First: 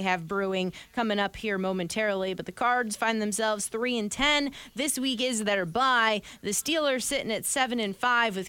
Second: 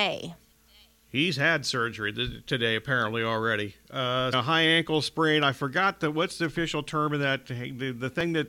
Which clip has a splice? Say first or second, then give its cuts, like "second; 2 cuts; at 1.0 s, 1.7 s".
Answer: second; 1 cut; at 4.3 s